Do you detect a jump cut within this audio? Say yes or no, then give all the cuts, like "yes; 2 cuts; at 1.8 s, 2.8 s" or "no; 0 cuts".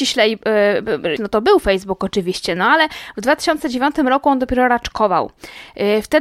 yes; 1 cut; at 1.2 s